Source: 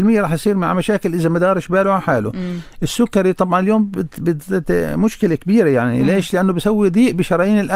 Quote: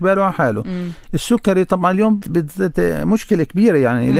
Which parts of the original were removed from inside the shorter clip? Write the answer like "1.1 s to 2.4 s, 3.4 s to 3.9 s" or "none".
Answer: 3.9 s to 4.1 s